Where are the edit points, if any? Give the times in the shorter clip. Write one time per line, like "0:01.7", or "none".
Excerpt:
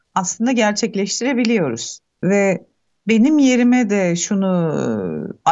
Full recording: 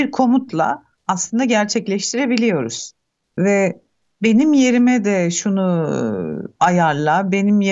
0:02.1